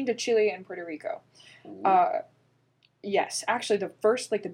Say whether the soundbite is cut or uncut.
uncut